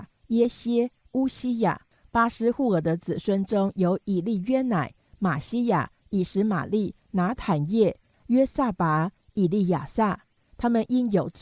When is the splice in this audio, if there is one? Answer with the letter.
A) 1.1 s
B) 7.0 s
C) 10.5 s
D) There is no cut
C